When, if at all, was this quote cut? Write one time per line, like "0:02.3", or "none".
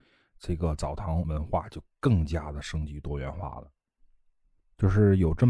none